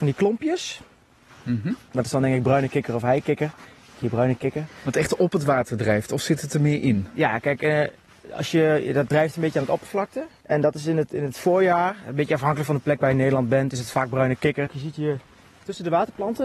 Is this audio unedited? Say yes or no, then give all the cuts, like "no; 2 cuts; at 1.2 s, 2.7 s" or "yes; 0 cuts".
no; 2 cuts; at 10.4 s, 14.7 s